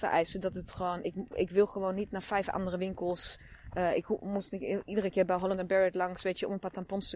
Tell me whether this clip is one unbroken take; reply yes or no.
yes